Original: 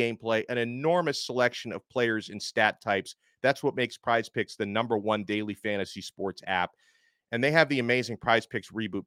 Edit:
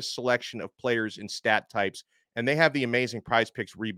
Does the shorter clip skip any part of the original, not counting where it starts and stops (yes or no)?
yes